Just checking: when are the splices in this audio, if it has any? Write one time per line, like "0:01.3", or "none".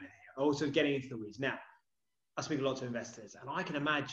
0:02.1